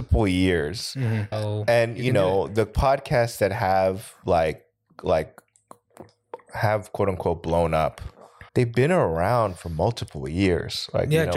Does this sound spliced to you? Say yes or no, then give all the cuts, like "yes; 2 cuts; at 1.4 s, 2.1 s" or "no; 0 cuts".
yes; 2 cuts; at 1.3 s, 8.5 s